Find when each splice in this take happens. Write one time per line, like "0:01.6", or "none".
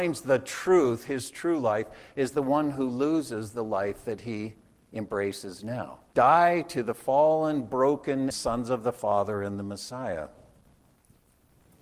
0:06.1
0:08.3

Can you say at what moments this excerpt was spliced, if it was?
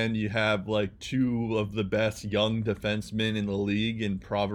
none

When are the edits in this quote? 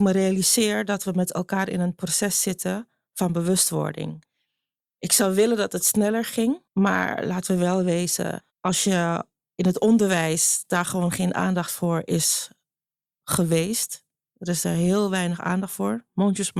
0:06.7
0:08.5

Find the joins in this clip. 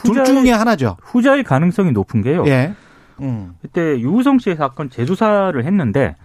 0:03.2

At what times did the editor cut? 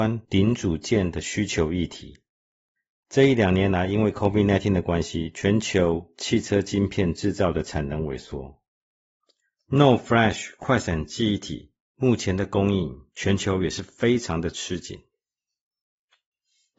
none

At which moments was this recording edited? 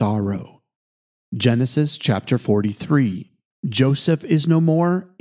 0:03.5

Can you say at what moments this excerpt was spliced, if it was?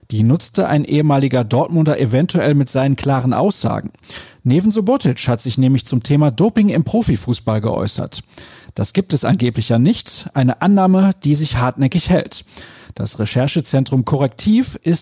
none

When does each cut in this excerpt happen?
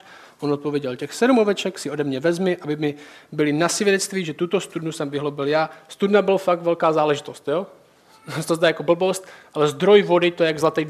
none

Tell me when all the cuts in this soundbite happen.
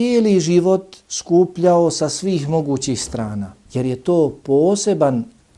0:03.6

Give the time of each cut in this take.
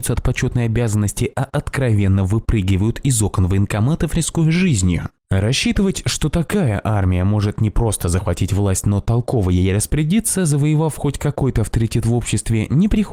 none

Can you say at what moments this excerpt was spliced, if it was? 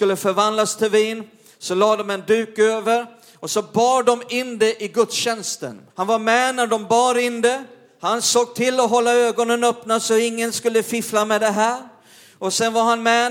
0:05.9

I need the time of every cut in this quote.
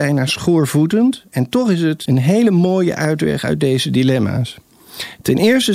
0:02.1

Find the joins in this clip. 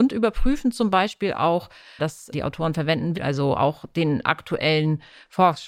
0:02.0
0:03.1

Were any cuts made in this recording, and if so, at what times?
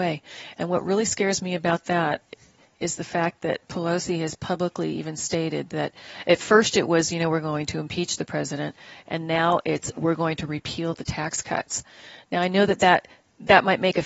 none

